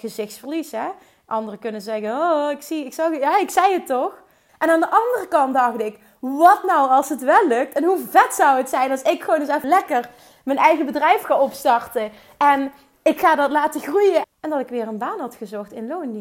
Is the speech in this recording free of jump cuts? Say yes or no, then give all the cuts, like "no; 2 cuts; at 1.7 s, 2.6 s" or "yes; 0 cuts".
no; 3 cuts; at 4.5 s, 9.6 s, 14.2 s